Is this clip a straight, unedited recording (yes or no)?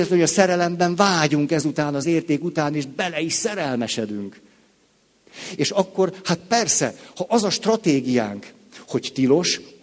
yes